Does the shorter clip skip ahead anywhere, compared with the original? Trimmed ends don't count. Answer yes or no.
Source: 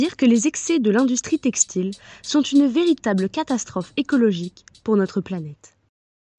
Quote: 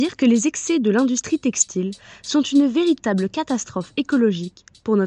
no